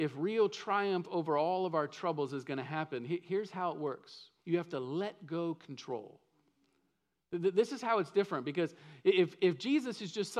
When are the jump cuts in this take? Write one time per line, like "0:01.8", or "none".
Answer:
0:04.4